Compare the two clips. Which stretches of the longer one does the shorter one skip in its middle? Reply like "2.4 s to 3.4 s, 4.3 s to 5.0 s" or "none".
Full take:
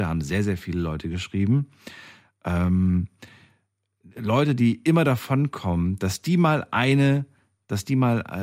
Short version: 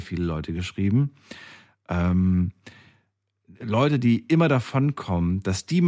none